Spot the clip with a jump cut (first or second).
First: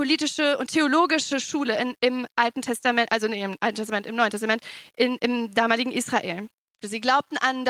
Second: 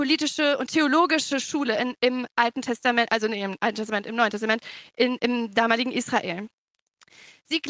first